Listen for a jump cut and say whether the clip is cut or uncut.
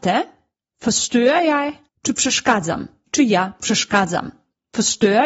cut